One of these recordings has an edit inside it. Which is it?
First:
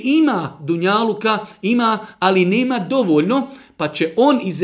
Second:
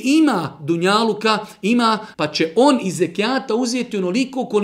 second; 1 cut; at 2.1 s

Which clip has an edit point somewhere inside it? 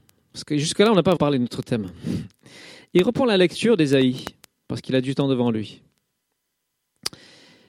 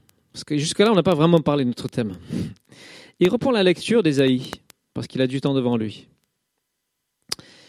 first; 1 cut; at 1.2 s

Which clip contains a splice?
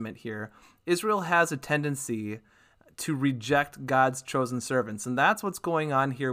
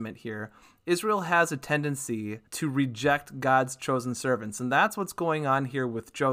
second; 1 cut; at 2.5 s

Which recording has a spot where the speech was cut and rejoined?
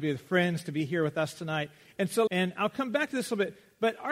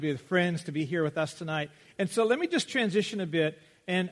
first; 1 cut; at 2.3 s

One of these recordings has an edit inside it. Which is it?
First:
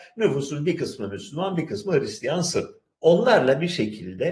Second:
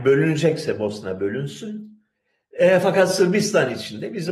first; 1 cut; at 2.9 s

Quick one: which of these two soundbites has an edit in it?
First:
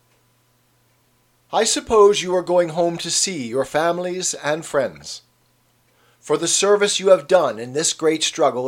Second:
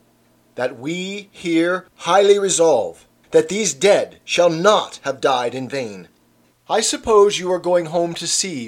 second; 1 cut; at 6.5 s

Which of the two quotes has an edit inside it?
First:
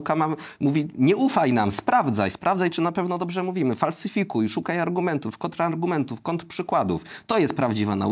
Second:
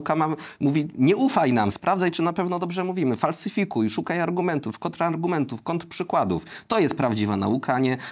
second; 1 cut; at 1.7 s

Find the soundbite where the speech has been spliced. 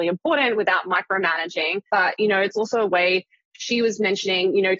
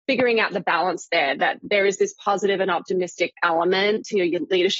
first; 1 cut; at 1.9 s

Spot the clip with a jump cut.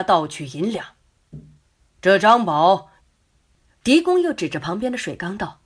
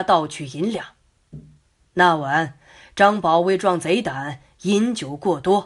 first; 2 cuts; at 1.8 s, 3.0 s

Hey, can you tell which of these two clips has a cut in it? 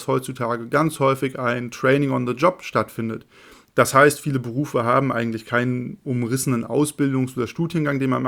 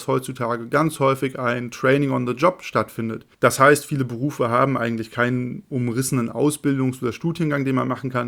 second; 1 cut; at 3.3 s

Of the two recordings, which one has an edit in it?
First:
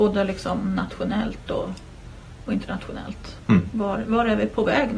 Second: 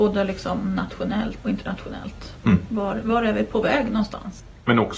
second; 1 cut; at 1.4 s

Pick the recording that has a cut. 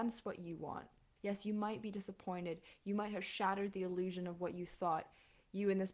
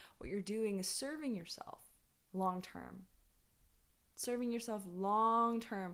first; 1 cut; at 1.2 s

